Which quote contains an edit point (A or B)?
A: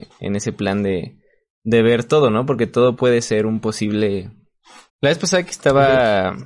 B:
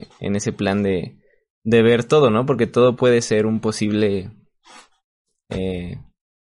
A